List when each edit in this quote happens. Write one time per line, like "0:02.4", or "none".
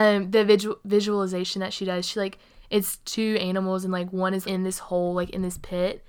0:04.4